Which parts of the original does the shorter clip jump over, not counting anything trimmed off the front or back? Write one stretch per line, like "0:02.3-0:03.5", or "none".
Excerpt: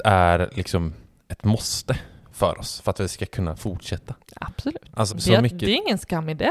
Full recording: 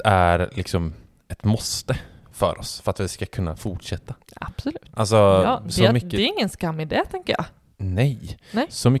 0:05.1-0:05.6